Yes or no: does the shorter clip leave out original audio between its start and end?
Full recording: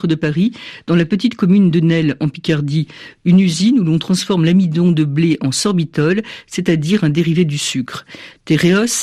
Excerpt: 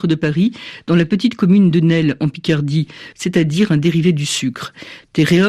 yes